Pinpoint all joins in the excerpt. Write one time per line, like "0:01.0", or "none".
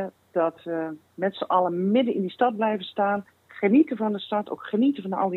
none